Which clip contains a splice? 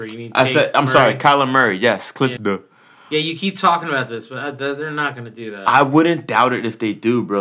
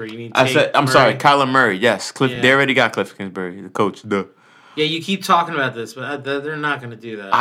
first; 1 cut; at 2.4 s

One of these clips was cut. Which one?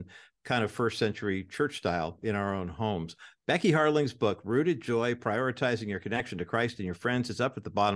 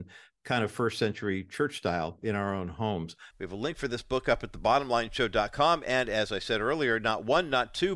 second; 1 cut; at 3.3 s

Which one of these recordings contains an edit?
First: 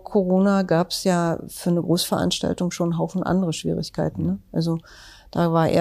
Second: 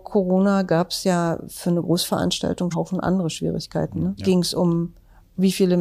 second; 2 cuts; at 2.7 s, 4.2 s

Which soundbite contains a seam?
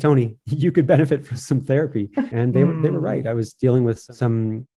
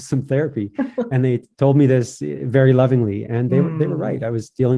first; 1 cut; at 2.3 s

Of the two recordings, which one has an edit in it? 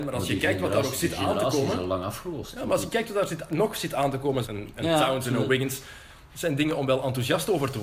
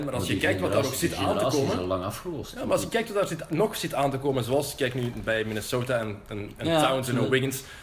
first; 1 cut; at 4.4 s

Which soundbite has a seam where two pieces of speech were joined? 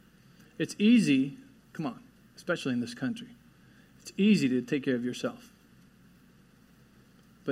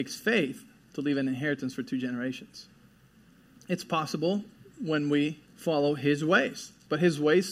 second; 2 cuts; at 3.6 s, 5.5 s

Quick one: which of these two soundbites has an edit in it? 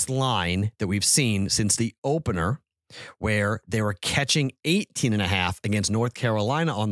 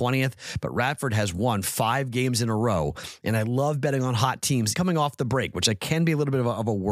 second; 1 cut; at 4.8 s

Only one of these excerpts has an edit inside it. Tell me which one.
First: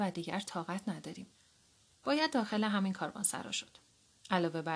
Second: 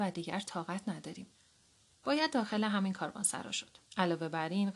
second; 1 cut; at 3.8 s

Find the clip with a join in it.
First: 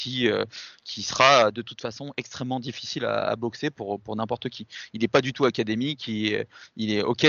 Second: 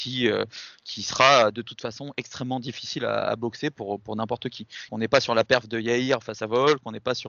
second; 1 cut; at 4.9 s

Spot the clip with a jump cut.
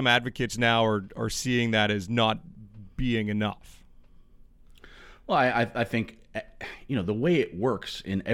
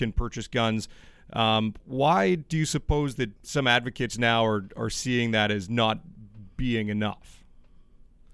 second; 1 cut; at 3.4 s

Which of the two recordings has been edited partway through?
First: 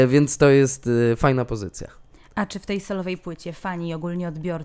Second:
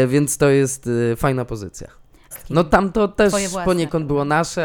second; 1 cut; at 2.3 s

